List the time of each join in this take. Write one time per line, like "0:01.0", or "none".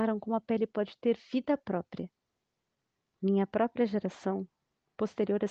0:03.1